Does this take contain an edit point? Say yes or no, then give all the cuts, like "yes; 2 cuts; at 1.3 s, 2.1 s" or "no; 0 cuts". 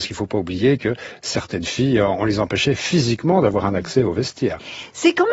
no; 0 cuts